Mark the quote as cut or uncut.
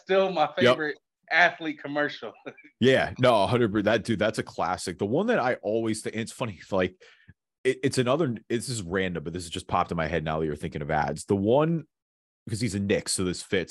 uncut